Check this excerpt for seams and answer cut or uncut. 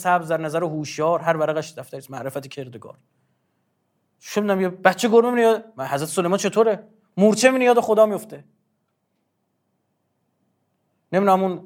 uncut